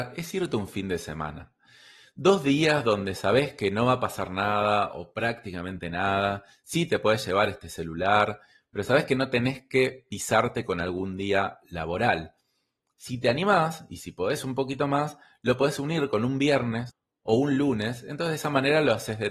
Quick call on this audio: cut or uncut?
uncut